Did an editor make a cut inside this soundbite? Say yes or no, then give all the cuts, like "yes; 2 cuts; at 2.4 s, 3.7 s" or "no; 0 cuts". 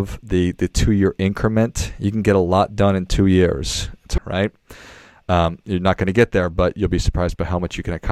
yes; 1 cut; at 4.2 s